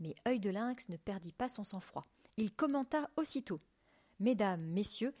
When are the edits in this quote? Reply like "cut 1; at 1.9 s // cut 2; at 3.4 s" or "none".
none